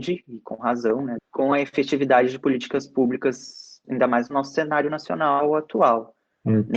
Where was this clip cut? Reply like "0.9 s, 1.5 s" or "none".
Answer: 1.2 s, 3.8 s